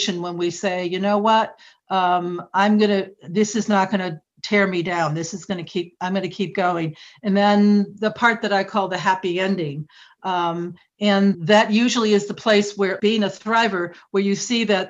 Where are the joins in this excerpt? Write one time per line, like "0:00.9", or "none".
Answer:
0:11.3
0:13.0